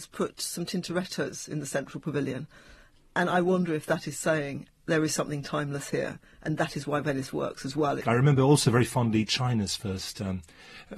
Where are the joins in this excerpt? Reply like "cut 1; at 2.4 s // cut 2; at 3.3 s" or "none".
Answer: cut 1; at 4.7 s // cut 2; at 8.0 s